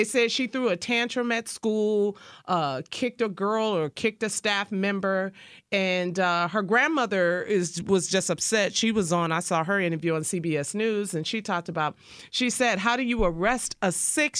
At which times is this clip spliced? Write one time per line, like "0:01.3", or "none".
none